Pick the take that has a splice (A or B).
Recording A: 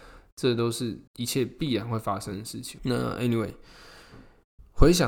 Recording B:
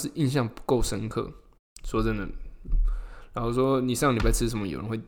A